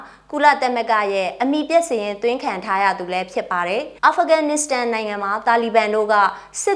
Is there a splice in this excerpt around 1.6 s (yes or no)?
no